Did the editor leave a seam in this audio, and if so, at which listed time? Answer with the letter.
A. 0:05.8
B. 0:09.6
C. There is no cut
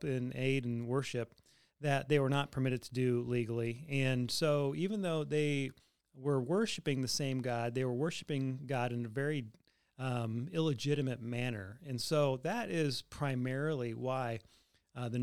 C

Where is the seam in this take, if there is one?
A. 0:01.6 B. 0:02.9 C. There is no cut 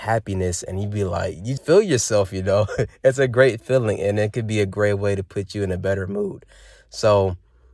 A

